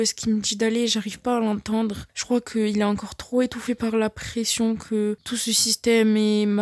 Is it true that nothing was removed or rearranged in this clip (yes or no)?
yes